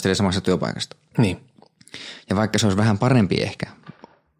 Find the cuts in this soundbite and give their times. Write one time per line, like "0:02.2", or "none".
none